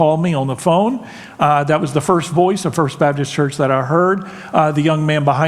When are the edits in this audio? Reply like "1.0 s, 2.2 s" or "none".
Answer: none